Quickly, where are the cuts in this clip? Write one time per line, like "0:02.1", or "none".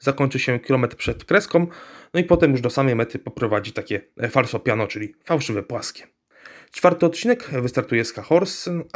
none